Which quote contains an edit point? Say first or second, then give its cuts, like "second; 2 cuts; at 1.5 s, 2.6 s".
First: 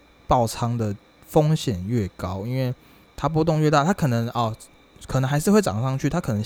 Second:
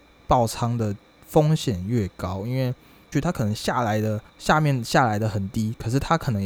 second; 2 cuts; at 3.1 s, 4.3 s